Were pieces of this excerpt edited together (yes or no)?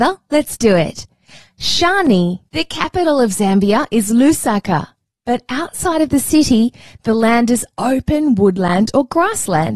yes